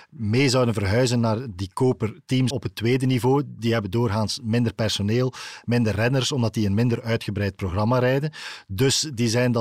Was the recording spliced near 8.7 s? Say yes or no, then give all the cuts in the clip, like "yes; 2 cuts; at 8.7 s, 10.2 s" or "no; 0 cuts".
no; 1 cut; at 2.5 s